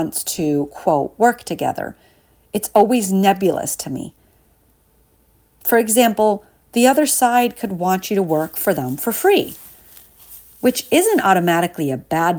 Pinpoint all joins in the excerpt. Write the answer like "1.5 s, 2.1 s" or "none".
none